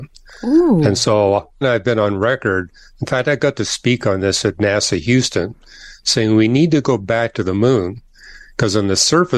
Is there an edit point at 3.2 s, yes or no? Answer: no